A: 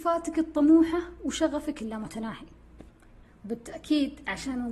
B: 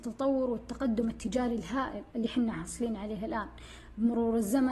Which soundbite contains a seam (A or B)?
B